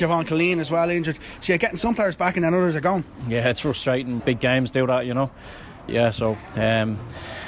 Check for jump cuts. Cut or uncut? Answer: cut